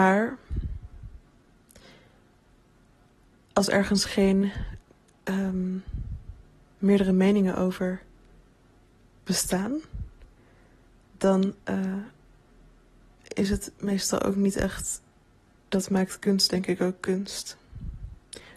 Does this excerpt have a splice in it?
yes; 1 cut; at 15.6 s

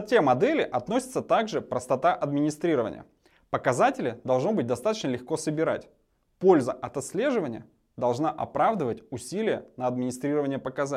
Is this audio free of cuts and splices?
yes; 0 cuts

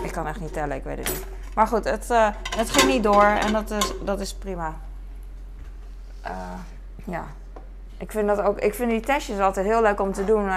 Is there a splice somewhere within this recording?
no; 0 cuts

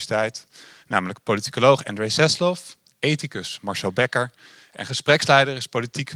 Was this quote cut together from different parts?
no; 0 cuts

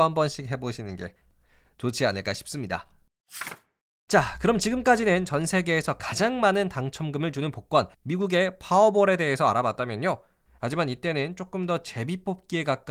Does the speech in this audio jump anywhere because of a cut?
yes; 2 cuts; at 7.9 s, 10.5 s

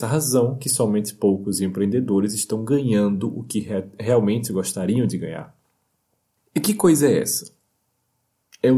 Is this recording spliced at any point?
no; 0 cuts

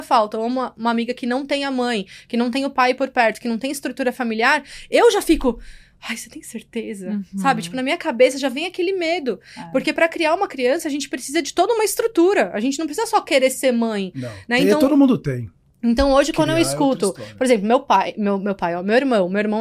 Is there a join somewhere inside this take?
no; 0 cuts

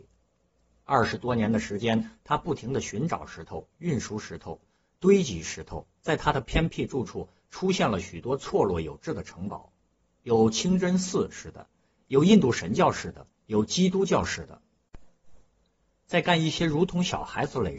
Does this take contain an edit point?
yes; 1 cut; at 16.0 s

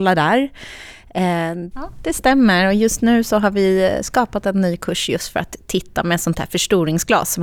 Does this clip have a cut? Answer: yes; 1 cut; at 1.7 s

